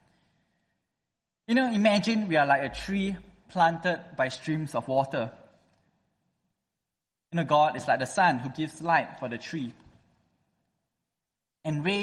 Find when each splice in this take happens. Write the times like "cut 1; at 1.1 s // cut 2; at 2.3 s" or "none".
none